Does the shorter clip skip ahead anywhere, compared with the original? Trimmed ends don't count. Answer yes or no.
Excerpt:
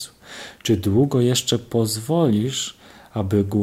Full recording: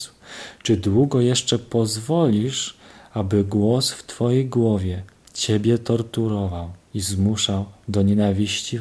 no